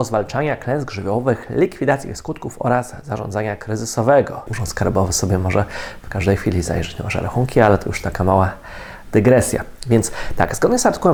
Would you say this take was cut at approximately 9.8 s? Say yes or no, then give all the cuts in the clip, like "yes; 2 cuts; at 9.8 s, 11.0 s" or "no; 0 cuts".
no; 1 cut; at 4.5 s